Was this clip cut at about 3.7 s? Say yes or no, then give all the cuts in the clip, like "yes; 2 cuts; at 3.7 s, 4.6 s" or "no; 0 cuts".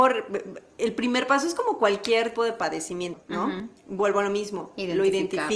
no; 1 cut; at 2.3 s